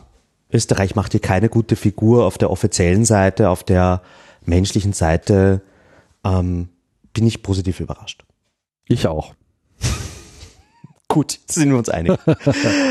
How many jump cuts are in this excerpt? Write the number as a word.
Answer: zero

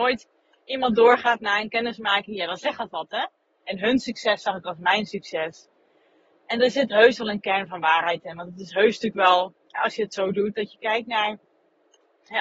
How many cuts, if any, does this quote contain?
two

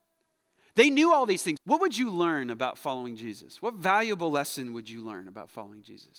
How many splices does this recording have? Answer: one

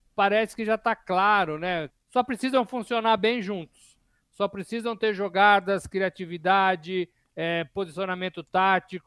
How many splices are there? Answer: one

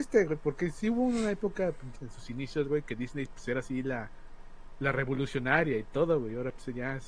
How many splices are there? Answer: one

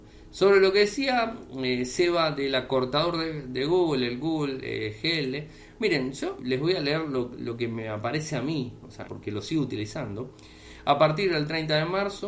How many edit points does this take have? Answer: two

